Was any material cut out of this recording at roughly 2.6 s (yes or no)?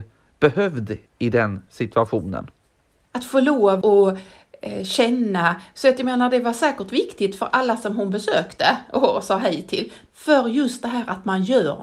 no